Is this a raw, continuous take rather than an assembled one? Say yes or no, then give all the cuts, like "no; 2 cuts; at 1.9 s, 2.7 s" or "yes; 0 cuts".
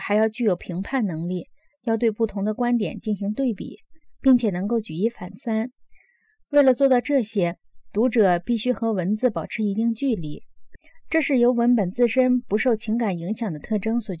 yes; 0 cuts